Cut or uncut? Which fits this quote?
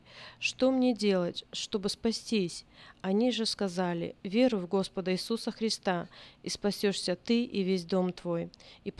uncut